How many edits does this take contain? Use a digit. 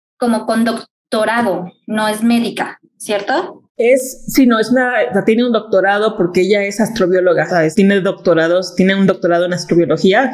1